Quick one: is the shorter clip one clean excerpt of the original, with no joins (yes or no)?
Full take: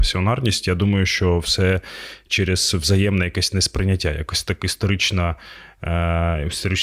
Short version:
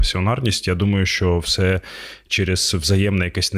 yes